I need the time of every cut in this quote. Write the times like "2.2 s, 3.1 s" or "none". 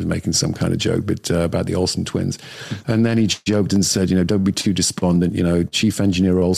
2.8 s